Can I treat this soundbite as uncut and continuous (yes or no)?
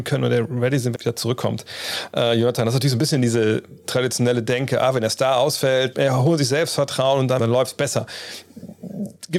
no